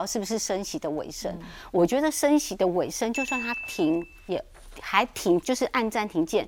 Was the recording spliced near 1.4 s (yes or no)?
no